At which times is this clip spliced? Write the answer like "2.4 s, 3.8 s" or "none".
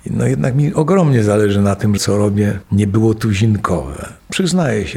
2.0 s